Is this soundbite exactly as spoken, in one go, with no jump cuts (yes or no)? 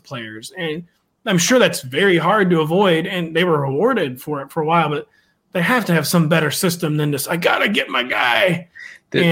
yes